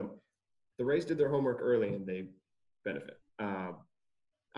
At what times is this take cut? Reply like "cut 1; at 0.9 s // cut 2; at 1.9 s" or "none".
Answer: cut 1; at 3.3 s